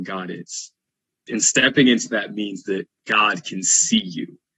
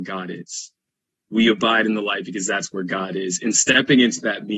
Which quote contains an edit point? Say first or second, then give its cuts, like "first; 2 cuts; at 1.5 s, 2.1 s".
first; 1 cut; at 1.3 s